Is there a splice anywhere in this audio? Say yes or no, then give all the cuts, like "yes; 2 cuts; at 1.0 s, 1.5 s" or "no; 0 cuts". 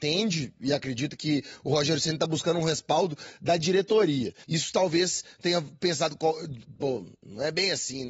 yes; 2 cuts; at 4.4 s, 6.8 s